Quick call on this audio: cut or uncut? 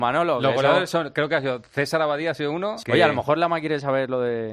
cut